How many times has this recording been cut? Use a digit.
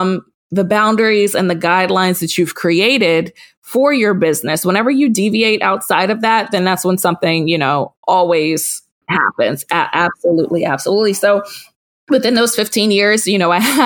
0